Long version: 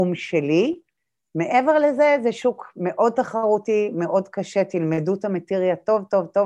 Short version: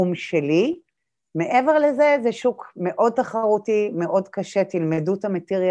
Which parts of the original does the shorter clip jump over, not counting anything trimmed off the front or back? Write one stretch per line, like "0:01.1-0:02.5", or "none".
none